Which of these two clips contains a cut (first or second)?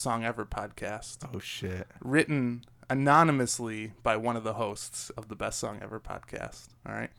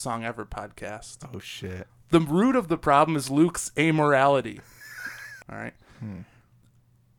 second